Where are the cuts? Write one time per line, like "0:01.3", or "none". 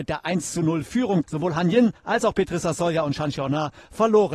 0:01.2